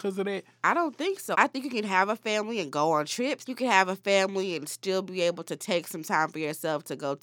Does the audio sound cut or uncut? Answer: cut